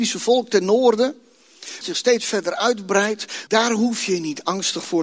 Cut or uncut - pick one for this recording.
cut